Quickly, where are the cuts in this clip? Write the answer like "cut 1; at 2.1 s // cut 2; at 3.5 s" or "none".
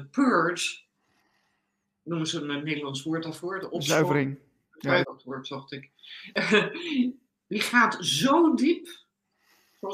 cut 1; at 5.0 s